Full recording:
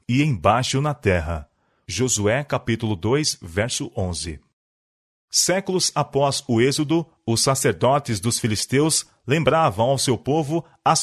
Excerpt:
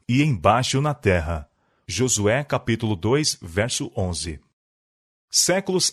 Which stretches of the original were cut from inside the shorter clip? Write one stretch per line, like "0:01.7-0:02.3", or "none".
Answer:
none